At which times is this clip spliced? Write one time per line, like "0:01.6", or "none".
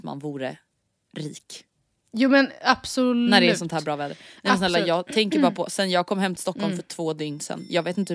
none

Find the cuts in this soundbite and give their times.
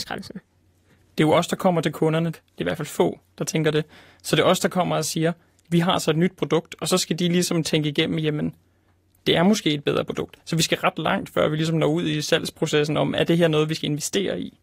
0:02.3

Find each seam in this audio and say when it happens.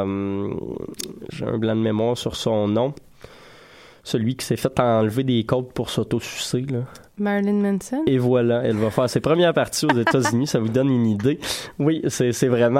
none

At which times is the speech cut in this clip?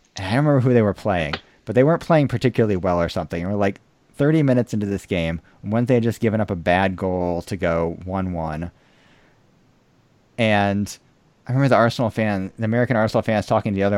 none

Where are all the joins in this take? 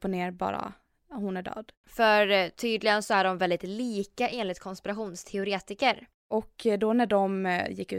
0:01.8
0:06.2

